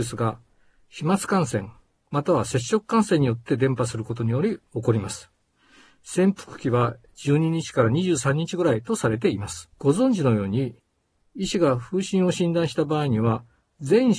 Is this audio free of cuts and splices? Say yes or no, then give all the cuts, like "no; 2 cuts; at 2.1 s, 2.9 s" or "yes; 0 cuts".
no; 1 cut; at 9.7 s